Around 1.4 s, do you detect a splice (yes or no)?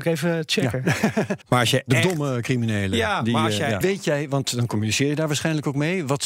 yes